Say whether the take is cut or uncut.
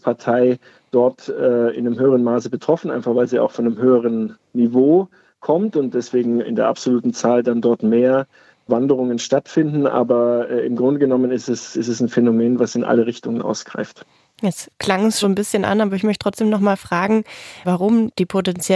cut